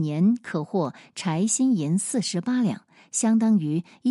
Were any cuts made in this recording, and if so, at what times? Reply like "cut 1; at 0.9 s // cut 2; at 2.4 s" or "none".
none

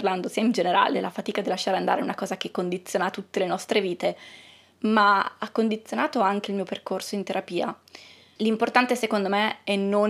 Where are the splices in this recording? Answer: cut 1; at 8.4 s

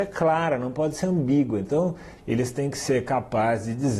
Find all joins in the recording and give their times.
cut 1; at 2.2 s

